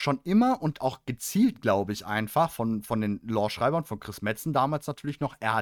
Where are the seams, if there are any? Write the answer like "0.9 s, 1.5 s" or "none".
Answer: none